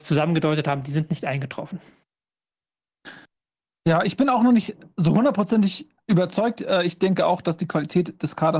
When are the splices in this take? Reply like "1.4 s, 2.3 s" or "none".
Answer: none